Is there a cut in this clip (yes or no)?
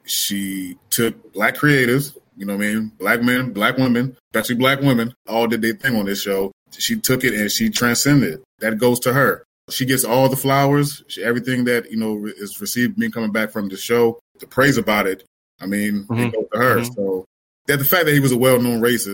no